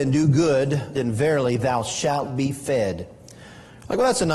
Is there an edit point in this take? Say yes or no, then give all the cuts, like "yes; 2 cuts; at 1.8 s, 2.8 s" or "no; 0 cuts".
yes; 1 cut; at 0.9 s